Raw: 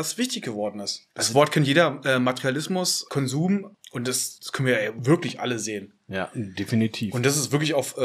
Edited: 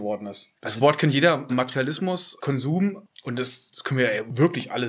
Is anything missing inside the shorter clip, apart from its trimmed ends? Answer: yes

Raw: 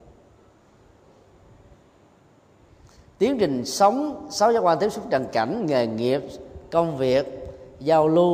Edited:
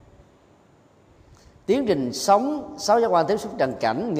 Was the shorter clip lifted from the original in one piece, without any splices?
yes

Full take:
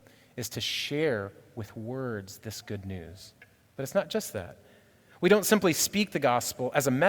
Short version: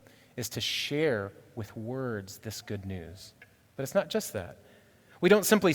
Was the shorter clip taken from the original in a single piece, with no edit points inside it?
yes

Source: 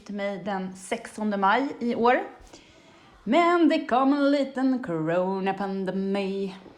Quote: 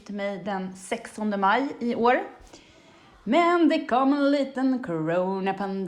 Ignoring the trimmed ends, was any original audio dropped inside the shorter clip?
no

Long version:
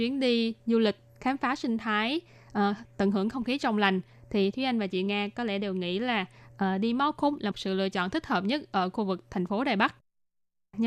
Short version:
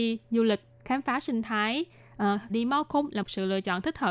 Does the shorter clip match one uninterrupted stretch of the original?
no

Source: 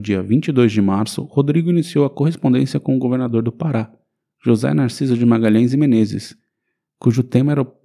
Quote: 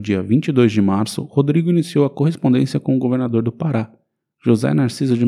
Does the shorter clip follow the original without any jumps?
yes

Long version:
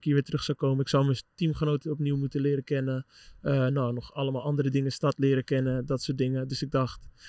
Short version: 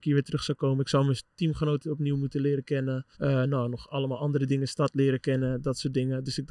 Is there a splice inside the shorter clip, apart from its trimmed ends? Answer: yes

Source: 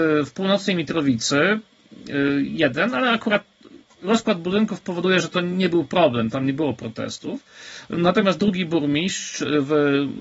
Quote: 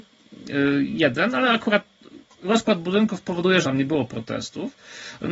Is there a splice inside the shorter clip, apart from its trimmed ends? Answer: yes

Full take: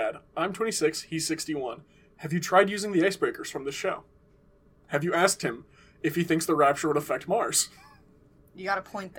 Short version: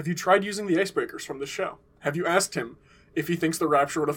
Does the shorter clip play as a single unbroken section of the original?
no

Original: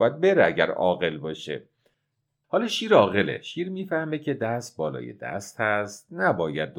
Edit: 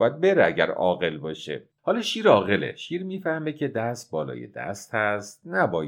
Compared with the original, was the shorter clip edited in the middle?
yes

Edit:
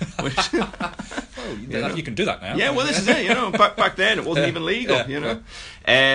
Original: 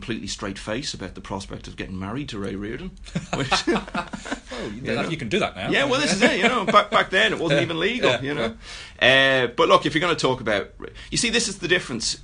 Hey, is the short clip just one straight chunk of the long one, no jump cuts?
yes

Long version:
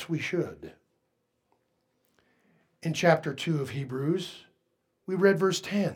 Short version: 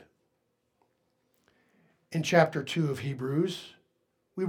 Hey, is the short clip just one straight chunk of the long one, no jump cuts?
yes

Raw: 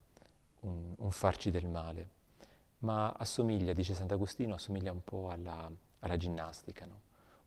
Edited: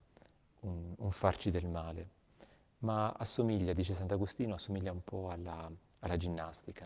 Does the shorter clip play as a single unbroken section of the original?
yes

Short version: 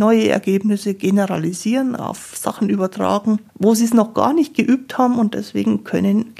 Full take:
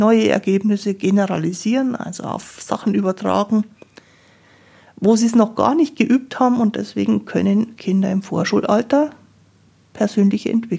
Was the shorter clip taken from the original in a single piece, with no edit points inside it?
no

